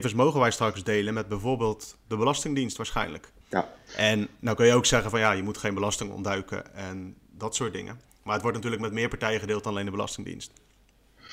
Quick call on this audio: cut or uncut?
cut